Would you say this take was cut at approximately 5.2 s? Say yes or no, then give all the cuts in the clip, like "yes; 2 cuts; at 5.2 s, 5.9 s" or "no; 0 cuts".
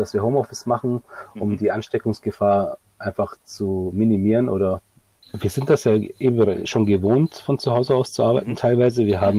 yes; 1 cut; at 5.2 s